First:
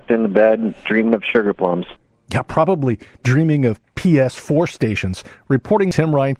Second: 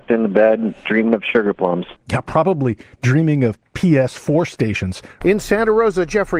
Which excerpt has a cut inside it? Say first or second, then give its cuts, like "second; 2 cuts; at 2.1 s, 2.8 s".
second; 2 cuts; at 2.0 s, 5.2 s